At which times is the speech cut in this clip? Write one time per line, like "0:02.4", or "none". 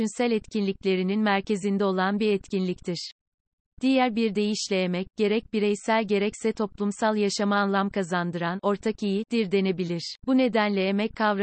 0:10.2